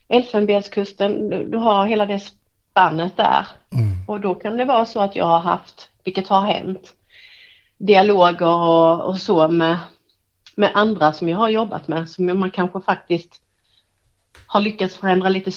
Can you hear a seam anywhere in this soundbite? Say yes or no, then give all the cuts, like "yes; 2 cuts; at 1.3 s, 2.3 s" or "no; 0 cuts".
no; 0 cuts